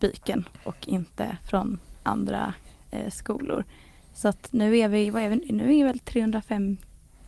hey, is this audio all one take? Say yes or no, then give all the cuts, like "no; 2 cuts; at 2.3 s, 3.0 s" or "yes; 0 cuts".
yes; 0 cuts